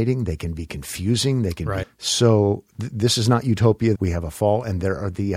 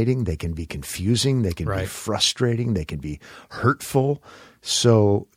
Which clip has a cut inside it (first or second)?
first